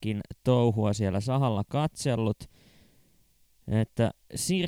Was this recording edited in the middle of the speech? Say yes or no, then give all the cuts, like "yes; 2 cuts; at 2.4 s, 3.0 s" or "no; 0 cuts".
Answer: no; 0 cuts